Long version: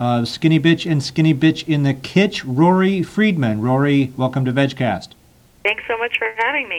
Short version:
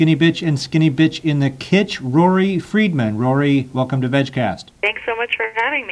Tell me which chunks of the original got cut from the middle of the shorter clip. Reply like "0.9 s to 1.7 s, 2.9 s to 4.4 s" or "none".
5.1 s to 5.5 s